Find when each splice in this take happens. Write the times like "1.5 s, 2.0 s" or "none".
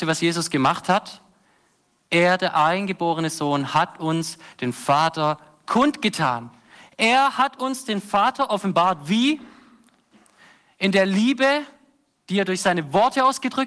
none